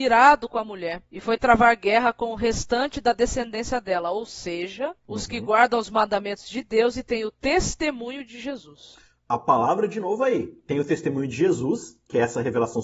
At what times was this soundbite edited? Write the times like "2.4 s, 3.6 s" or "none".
none